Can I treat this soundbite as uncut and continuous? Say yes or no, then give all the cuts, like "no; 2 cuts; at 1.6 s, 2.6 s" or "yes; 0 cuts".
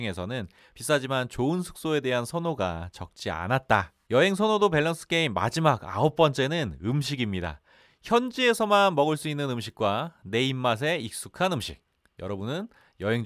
no; 1 cut; at 4.1 s